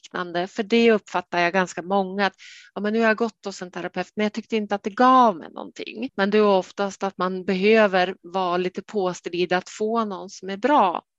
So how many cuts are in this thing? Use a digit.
1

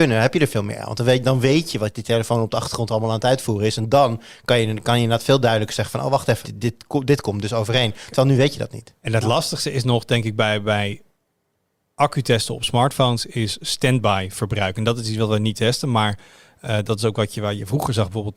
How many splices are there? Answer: 1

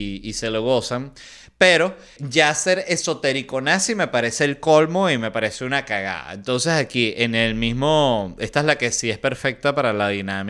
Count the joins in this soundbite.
1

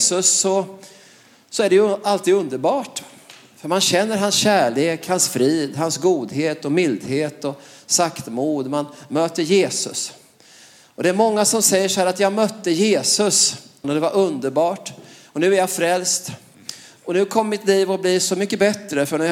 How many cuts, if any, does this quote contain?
1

